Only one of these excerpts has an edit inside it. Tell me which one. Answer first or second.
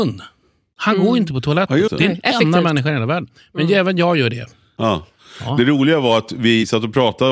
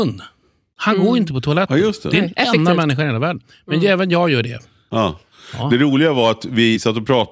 first